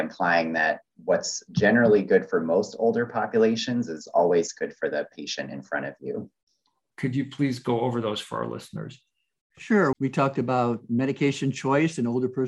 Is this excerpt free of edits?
no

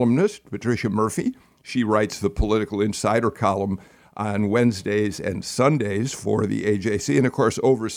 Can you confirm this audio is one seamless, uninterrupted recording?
yes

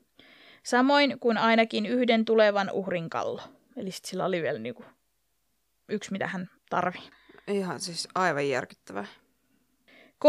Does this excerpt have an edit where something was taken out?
yes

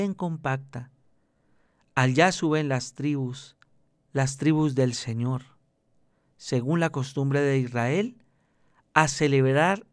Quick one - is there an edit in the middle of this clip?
no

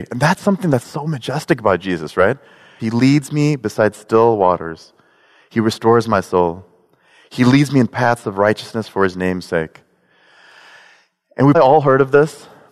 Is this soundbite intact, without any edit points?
no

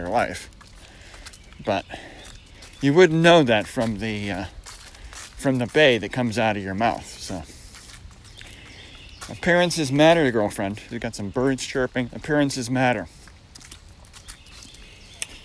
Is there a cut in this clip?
yes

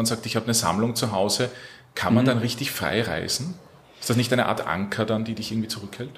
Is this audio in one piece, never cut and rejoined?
yes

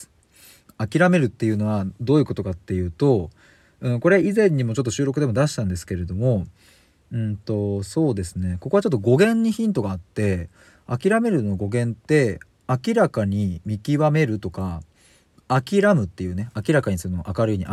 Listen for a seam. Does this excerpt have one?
no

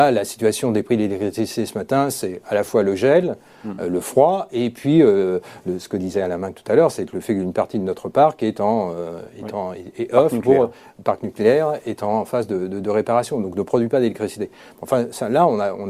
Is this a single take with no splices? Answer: yes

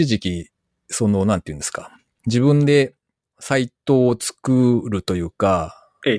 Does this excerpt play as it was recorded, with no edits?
yes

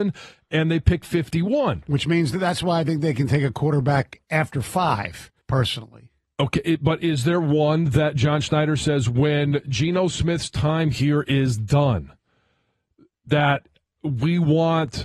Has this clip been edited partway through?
yes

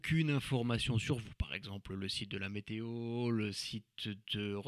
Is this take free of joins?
yes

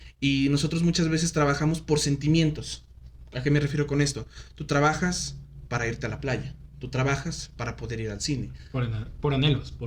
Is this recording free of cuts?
yes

